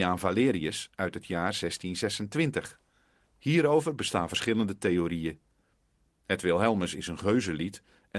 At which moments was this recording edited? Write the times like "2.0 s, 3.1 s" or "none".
3.2 s